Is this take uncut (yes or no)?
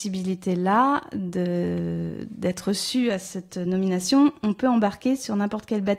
yes